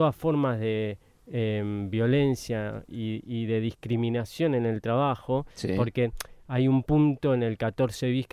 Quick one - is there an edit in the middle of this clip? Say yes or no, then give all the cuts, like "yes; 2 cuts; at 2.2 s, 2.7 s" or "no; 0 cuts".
no; 0 cuts